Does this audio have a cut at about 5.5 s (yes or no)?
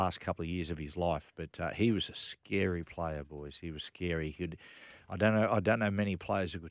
no